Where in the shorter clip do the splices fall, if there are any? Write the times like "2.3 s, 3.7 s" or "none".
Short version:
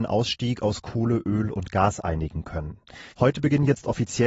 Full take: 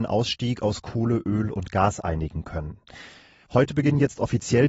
3.1 s

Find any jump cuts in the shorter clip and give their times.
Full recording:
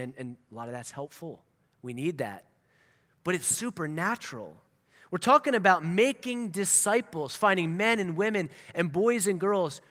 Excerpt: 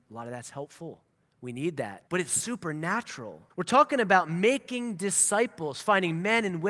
2.1 s, 3.5 s

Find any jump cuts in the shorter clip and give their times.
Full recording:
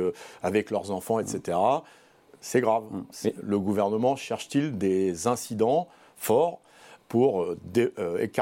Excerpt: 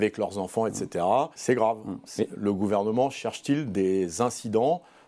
1.3 s

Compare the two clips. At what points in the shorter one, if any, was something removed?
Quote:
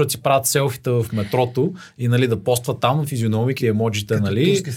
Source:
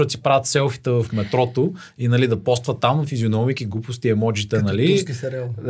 3.6 s

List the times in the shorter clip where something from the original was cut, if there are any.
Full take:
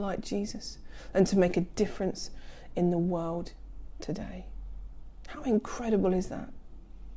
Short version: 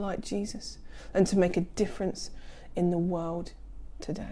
none

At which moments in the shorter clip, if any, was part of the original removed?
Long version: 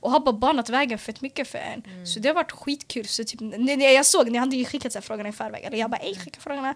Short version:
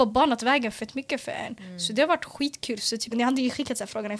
3.1 s

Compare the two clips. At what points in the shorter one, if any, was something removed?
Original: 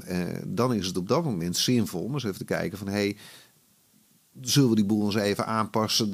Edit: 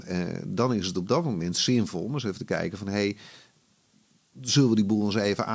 none

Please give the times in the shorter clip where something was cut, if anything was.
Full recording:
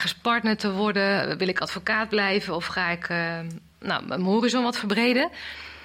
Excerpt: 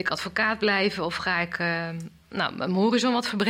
none

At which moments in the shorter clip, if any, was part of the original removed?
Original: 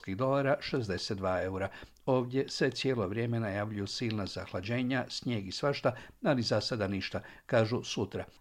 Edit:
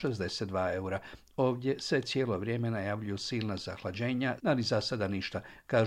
4.4 s

